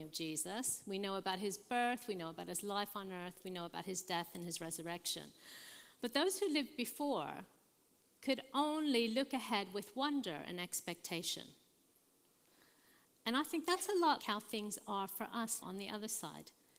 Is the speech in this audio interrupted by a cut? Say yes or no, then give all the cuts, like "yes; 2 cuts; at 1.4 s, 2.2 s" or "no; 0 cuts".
yes; 2 cuts; at 14.2 s, 15.6 s